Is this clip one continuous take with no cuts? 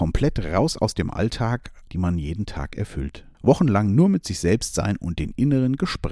no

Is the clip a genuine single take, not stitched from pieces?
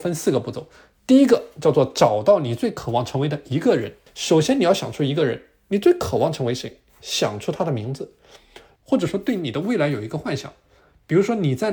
no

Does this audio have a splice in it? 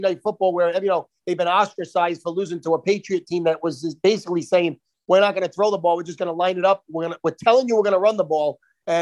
no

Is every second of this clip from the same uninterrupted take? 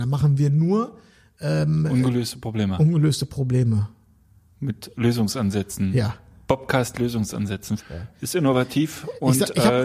no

